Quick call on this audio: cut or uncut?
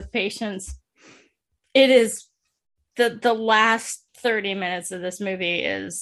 cut